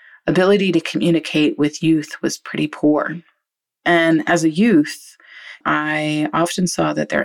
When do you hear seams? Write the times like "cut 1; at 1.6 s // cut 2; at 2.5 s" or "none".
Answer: cut 1; at 3.7 s // cut 2; at 5.6 s